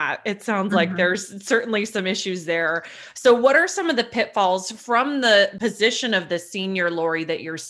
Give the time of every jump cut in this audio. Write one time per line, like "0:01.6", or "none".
none